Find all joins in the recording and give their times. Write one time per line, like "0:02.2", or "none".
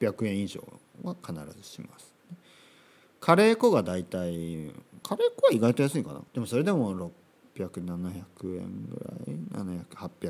0:05.0
0:06.3